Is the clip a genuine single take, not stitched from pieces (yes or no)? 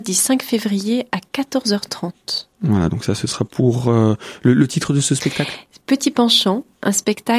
no